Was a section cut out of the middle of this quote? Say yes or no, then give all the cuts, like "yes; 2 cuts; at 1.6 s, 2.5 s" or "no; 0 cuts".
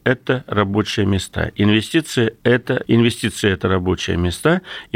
yes; 1 cut; at 2.8 s